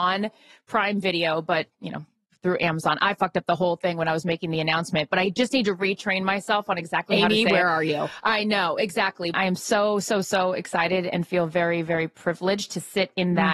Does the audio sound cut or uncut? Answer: cut